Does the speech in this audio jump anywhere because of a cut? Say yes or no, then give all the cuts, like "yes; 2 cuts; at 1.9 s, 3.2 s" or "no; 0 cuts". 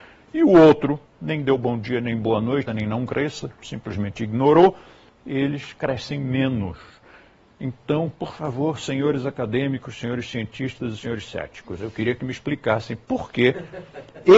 yes; 2 cuts; at 1.1 s, 2.7 s